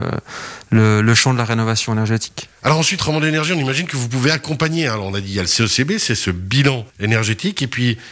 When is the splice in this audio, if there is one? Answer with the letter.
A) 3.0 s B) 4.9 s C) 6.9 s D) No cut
C